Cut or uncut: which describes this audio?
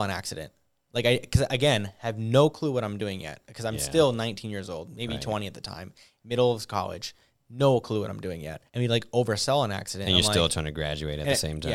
cut